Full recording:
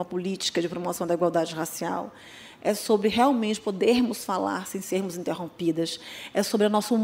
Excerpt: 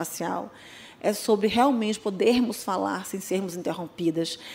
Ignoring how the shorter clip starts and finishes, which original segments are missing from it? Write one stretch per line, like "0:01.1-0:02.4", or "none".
none